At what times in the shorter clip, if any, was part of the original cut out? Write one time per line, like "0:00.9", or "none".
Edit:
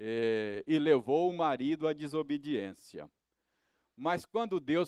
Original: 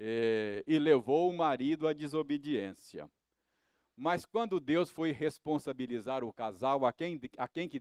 none